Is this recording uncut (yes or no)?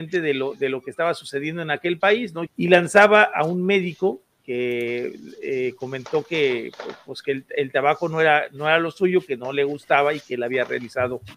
no